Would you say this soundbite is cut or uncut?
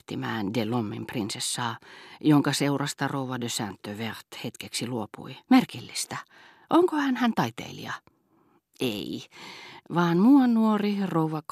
cut